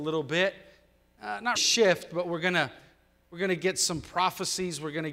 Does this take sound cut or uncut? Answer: cut